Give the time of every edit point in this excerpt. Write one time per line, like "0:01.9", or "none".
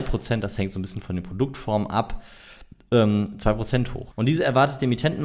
0:04.1